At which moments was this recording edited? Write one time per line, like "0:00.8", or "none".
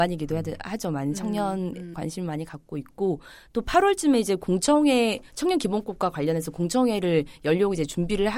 0:01.9